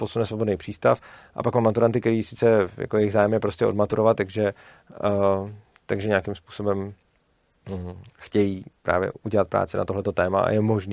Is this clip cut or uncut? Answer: cut